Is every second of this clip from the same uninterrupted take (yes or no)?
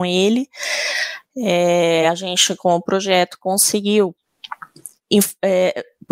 yes